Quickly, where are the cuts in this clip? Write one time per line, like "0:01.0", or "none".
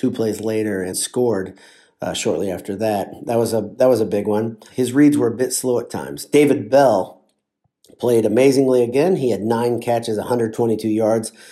0:00.9